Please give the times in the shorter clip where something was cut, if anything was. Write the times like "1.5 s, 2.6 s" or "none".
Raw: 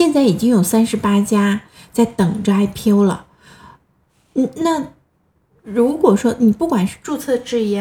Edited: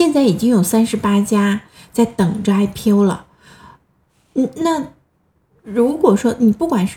none

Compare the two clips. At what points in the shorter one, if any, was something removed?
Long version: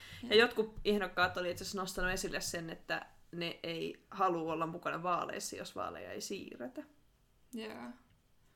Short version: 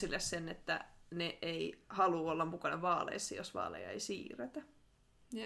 none

